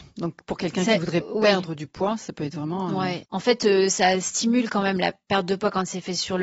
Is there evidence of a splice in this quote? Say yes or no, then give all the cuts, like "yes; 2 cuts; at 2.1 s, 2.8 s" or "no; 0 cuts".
yes; 1 cut; at 3.2 s